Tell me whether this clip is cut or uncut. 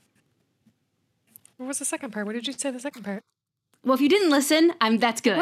uncut